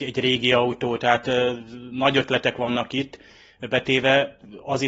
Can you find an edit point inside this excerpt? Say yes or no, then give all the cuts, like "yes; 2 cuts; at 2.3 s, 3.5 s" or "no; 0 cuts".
no; 0 cuts